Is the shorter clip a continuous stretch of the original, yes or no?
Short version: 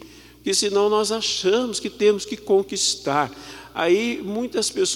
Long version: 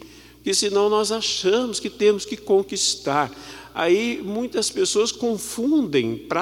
yes